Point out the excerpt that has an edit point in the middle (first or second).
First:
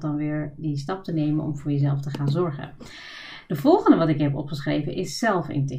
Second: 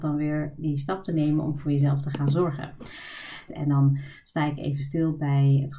second